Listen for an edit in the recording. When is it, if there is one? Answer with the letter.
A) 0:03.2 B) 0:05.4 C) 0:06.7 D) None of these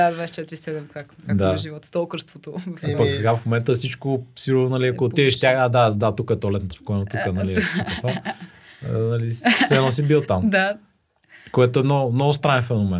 C